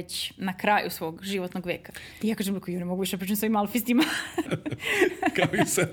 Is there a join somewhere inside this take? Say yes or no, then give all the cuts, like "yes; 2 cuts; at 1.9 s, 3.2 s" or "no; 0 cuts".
yes; 2 cuts; at 2.2 s, 4.4 s